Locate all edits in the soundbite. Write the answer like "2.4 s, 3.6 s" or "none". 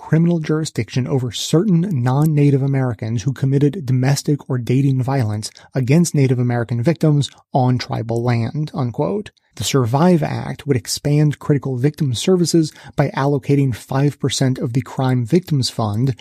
9.5 s